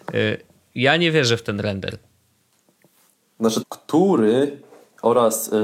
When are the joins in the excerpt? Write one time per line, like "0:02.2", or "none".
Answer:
0:03.6